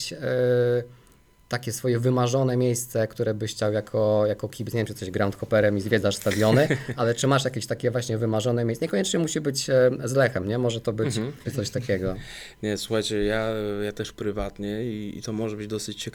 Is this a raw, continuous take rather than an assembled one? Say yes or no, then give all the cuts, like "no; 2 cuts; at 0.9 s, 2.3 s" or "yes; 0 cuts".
no; 1 cut; at 11.4 s